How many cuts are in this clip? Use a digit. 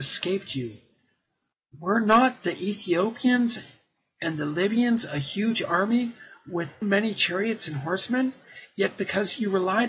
1